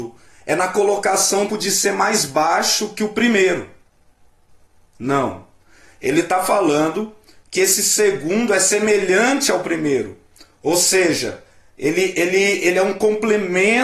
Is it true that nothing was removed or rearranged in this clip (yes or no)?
no